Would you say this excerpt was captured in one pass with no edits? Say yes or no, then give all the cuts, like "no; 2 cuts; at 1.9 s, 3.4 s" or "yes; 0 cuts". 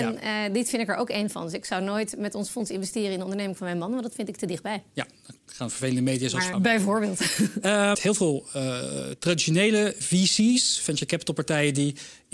no; 2 cuts; at 6.5 s, 7.9 s